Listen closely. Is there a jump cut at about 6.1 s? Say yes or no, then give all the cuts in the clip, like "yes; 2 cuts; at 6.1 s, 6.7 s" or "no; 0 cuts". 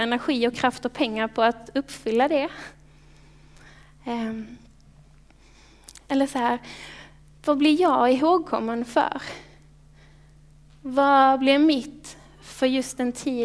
yes; 1 cut; at 6.1 s